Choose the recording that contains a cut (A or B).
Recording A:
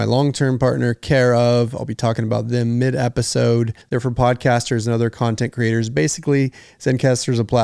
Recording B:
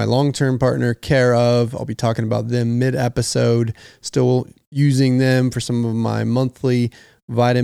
A